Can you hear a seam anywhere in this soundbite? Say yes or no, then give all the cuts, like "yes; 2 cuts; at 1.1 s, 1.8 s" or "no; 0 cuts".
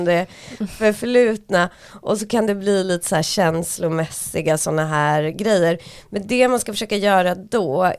no; 0 cuts